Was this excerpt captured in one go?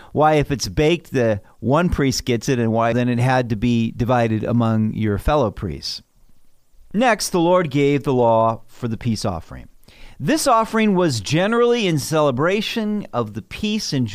no; 1 cut; at 2.9 s

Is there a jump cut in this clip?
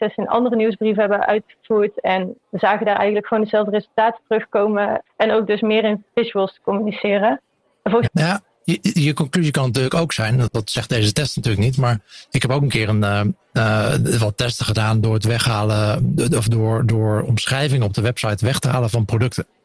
yes; 3 cuts; at 5.1 s, 8.1 s, 10.5 s

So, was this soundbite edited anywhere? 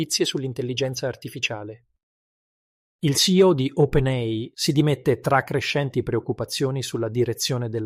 yes; 1 cut; at 4.5 s

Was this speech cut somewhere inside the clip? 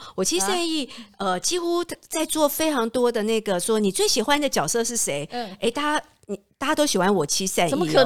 no; 0 cuts

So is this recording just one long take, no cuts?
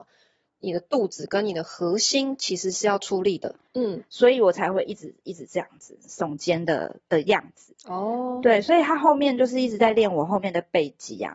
no; 1 cut; at 3.7 s

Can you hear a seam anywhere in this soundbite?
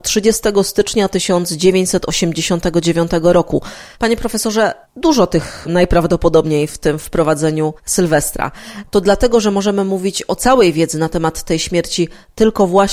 no; 0 cuts

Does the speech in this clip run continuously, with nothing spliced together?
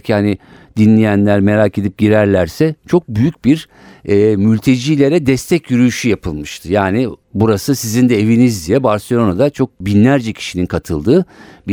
no; 1 cut; at 7.2 s

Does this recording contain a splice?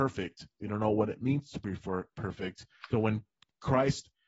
yes; 1 cut; at 2.9 s

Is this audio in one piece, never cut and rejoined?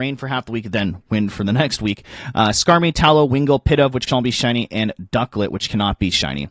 yes; 0 cuts

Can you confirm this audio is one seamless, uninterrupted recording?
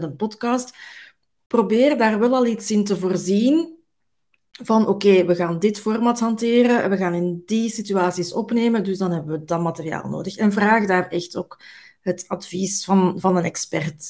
yes; 0 cuts

